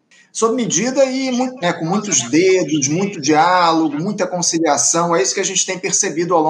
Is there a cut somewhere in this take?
yes; 1 cut; at 1.6 s

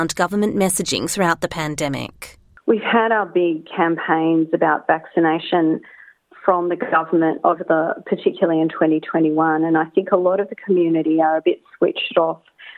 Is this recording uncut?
yes; 0 cuts

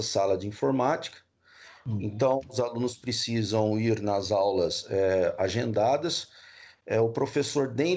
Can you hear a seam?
no; 0 cuts

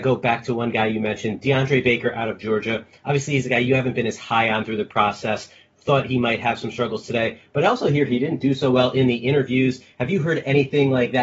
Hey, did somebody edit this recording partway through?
no; 0 cuts

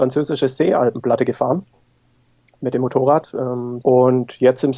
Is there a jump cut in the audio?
yes; 1 cut; at 3.8 s

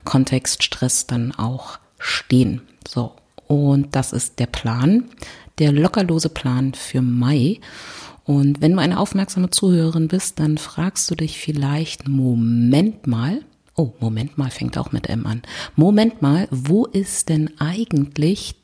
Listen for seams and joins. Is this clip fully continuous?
yes; 0 cuts

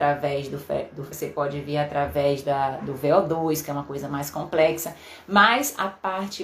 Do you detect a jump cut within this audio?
yes; 1 cut; at 1.1 s

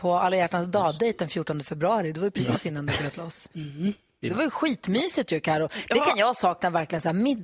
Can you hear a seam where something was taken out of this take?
yes; 1 cut; at 4.2 s

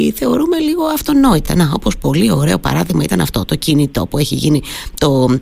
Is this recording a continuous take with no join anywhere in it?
yes; 0 cuts

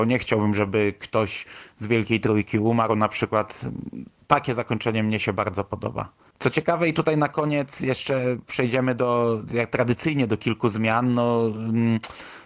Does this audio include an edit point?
no; 0 cuts

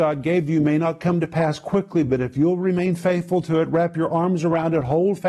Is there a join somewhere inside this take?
no; 0 cuts

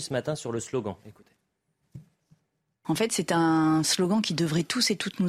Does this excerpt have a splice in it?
no; 0 cuts

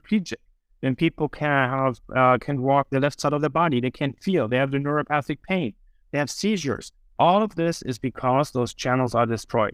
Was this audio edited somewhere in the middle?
no; 0 cuts

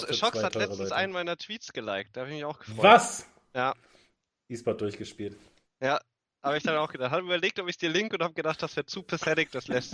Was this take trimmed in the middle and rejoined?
no; 0 cuts

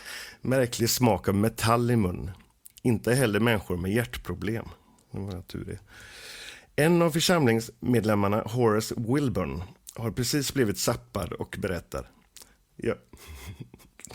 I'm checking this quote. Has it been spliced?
yes; 1 cut; at 2.7 s

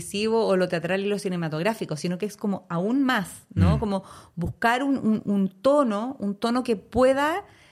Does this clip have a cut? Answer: no; 0 cuts

